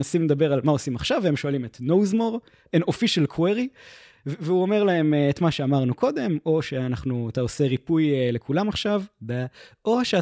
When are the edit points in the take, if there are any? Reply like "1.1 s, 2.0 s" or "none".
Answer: none